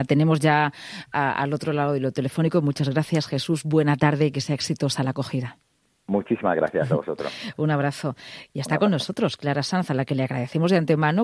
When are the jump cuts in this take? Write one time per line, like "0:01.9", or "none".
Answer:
none